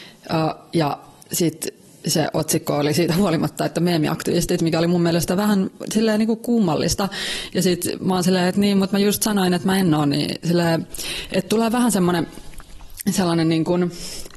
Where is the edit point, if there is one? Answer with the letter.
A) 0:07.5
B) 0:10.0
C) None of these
A